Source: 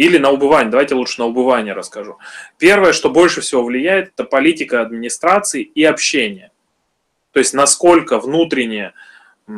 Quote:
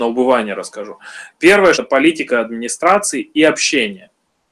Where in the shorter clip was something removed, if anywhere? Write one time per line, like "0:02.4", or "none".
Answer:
0:01.7